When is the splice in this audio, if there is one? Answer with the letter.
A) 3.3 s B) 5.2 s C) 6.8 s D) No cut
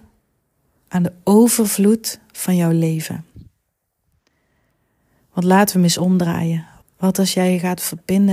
C